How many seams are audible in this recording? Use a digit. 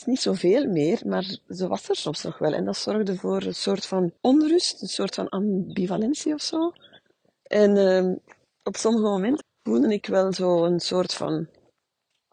2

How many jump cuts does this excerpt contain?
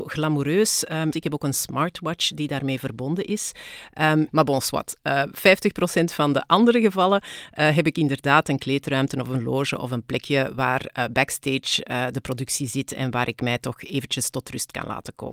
2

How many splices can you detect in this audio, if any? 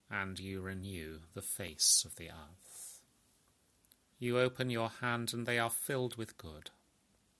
1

